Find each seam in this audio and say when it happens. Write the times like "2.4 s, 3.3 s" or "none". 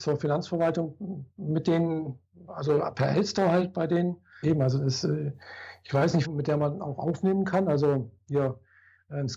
4.4 s, 6.2 s